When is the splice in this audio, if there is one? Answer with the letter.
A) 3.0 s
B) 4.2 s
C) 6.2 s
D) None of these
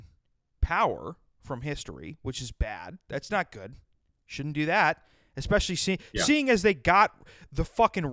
D